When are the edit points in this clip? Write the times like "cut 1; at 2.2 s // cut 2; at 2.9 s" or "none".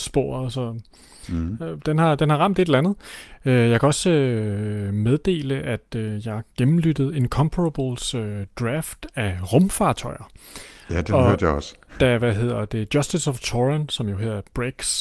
none